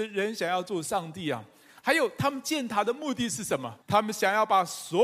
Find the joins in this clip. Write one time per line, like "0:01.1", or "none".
0:03.8